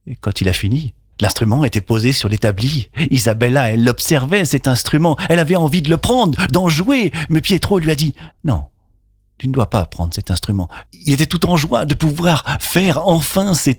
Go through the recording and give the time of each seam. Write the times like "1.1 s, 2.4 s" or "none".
1.1 s, 8.3 s, 10.9 s